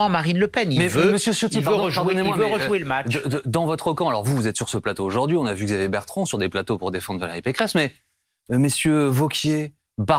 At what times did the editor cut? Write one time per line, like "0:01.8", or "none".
none